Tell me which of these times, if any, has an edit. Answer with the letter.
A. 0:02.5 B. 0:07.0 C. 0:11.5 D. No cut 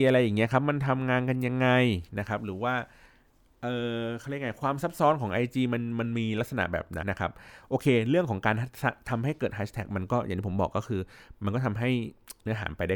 B